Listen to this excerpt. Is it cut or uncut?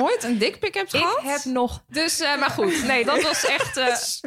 cut